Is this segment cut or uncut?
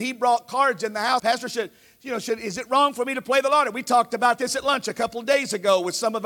cut